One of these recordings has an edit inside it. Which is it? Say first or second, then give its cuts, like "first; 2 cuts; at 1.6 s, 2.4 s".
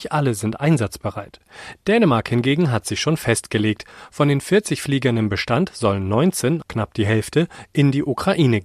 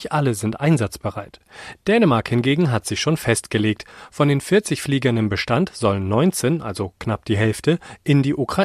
first; 1 cut; at 6.6 s